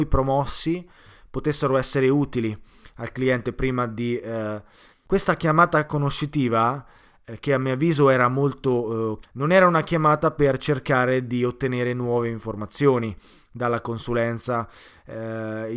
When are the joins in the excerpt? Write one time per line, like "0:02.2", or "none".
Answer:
0:04.9
0:09.2